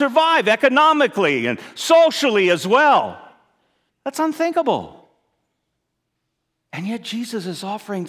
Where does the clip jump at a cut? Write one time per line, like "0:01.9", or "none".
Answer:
0:03.9